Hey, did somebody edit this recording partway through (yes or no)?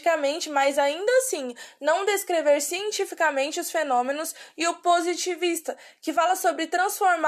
no